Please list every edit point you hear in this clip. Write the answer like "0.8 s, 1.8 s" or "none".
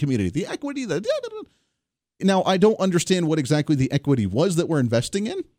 2.2 s

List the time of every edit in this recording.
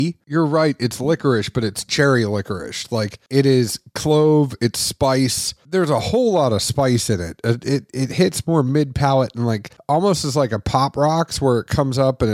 none

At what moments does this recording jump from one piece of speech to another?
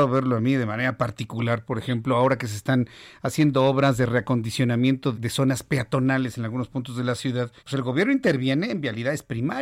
5.1 s, 7.6 s

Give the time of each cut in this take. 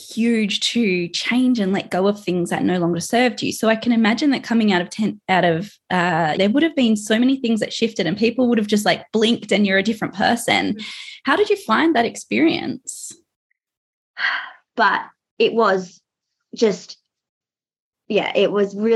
6.4 s, 14.7 s

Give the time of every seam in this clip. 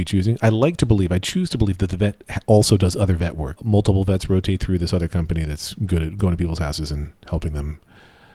3.6 s

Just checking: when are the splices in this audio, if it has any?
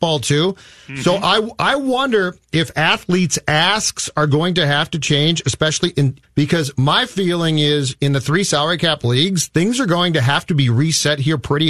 6.2 s

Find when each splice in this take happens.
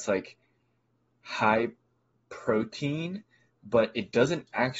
none

